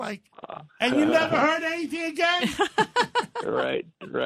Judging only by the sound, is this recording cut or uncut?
uncut